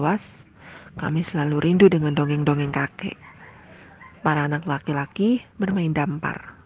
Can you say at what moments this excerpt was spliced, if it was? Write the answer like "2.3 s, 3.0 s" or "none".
4.2 s